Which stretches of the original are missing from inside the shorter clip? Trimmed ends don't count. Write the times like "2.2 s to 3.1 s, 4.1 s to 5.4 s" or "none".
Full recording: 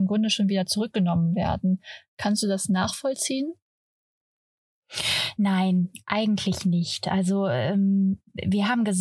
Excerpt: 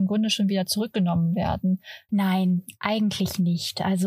2.1 s to 5.4 s